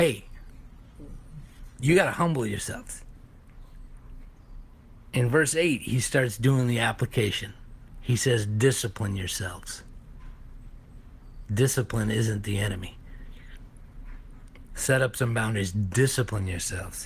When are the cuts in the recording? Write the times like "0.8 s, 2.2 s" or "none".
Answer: 11.5 s